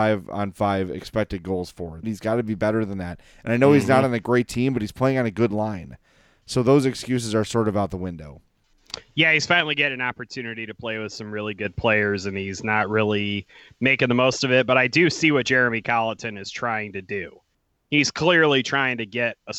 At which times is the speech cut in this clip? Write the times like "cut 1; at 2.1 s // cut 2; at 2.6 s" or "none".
cut 1; at 2.0 s